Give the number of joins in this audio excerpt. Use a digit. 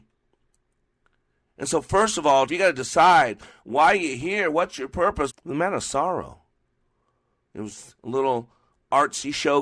3